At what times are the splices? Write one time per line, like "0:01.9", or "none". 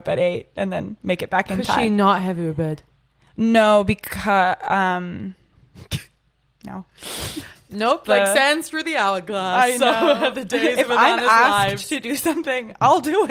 none